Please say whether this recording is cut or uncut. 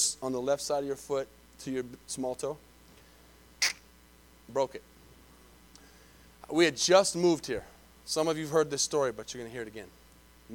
uncut